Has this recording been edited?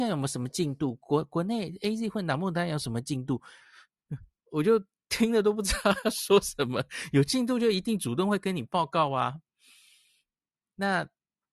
no; 0 cuts

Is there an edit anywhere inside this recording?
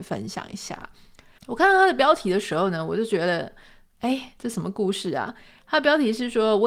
yes; 1 cut; at 1.4 s

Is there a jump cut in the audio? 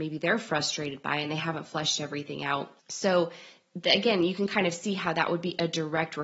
yes; 1 cut; at 2.8 s

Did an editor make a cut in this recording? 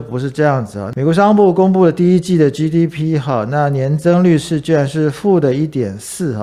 no; 0 cuts

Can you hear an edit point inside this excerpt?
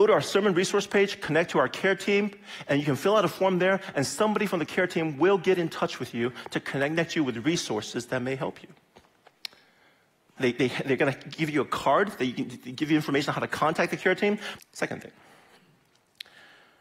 yes; 2 cuts; at 10.4 s, 14.6 s

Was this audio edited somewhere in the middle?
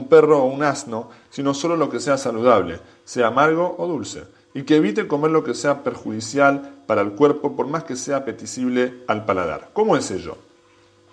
no; 0 cuts

